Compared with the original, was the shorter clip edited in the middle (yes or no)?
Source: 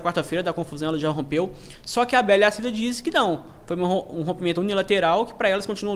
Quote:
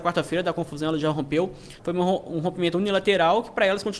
yes